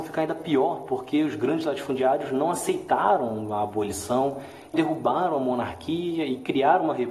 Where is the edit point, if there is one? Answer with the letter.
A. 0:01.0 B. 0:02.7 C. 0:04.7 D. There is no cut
C